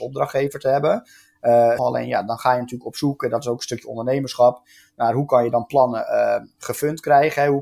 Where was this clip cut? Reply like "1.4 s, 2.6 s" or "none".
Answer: 1.8 s

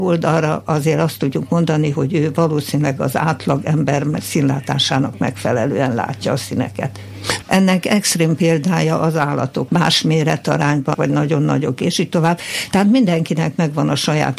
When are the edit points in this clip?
7.4 s, 9.7 s, 10.9 s

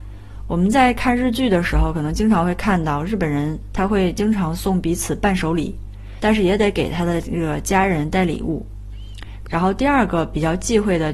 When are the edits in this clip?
6.2 s, 9.4 s

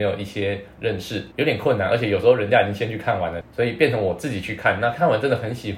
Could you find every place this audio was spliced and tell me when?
1.3 s, 3.4 s

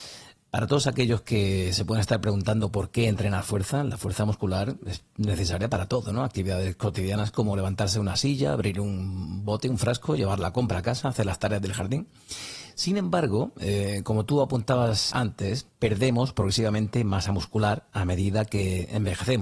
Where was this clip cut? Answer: 15.1 s

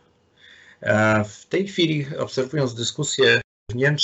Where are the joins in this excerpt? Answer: none

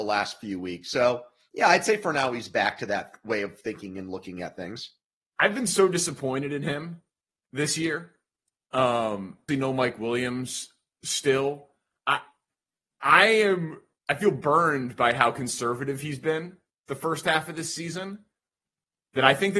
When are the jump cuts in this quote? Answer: 9.5 s

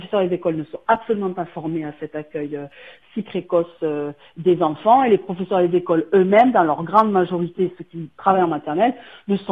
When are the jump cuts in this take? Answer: none

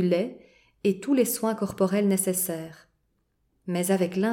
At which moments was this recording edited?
none

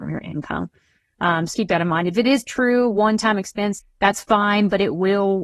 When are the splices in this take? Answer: 1.5 s, 3.8 s

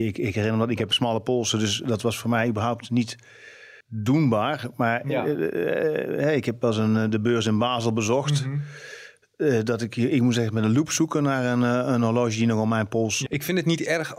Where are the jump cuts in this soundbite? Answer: 3.8 s, 13.3 s

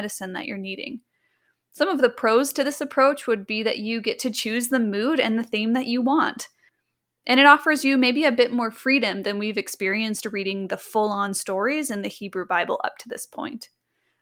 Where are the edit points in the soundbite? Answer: none

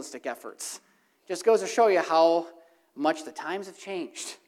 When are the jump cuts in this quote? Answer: none

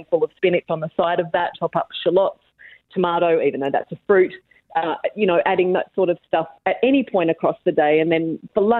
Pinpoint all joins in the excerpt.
1.5 s

